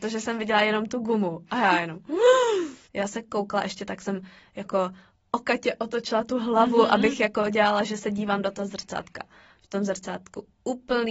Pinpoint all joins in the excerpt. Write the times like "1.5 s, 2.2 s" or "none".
2.9 s